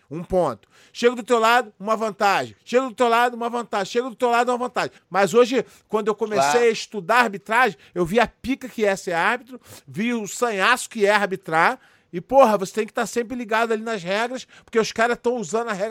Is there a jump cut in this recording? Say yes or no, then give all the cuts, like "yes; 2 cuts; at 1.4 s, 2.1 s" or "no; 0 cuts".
yes; 1 cut; at 5.0 s